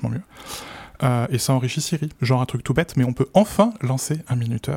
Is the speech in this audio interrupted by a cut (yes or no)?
yes